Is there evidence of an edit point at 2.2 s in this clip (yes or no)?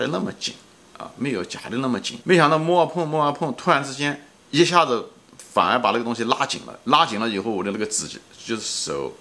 yes